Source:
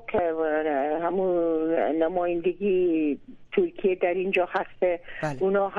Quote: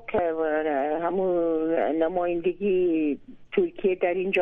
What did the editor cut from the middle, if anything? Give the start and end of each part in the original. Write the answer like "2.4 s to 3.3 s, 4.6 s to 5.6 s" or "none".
none